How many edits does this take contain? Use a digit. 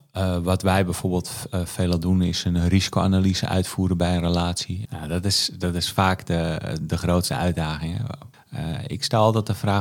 2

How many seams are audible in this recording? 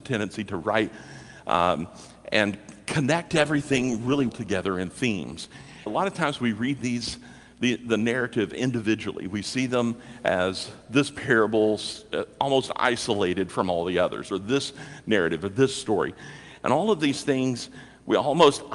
2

